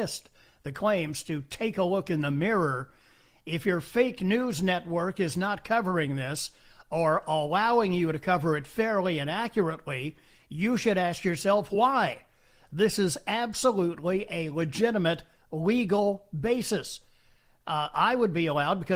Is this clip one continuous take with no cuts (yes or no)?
yes